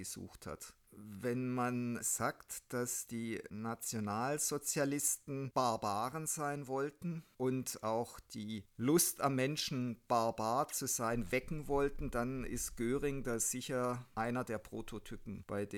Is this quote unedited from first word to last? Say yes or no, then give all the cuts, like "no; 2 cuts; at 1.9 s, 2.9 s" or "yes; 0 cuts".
yes; 0 cuts